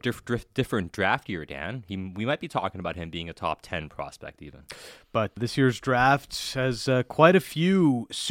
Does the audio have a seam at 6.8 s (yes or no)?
no